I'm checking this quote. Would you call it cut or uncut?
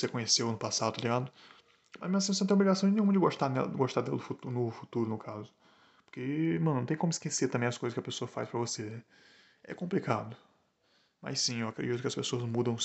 uncut